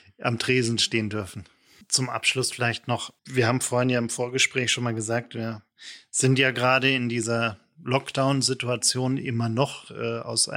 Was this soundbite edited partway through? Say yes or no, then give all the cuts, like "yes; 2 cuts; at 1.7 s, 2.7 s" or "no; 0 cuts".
yes; 2 cuts; at 1.8 s, 3.2 s